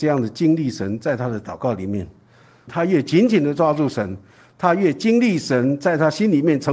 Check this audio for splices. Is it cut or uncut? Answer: cut